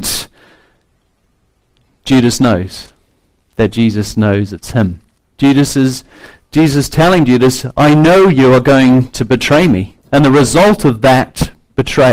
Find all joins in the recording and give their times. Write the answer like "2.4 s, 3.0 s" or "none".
5.2 s, 10.0 s